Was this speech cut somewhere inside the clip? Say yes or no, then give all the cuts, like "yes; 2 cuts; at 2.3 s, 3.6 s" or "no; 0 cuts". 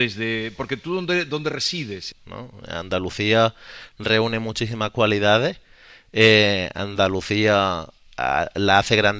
yes; 1 cut; at 2.1 s